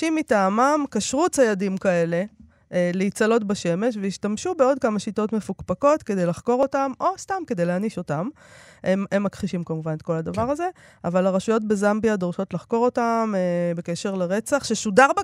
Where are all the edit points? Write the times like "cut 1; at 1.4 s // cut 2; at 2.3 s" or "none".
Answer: none